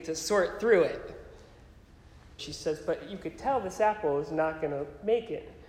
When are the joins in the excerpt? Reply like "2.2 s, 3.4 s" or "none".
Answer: 2.4 s